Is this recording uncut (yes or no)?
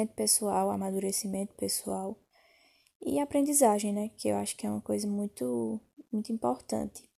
yes